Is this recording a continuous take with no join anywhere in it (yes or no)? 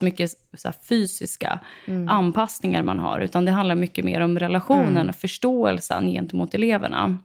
yes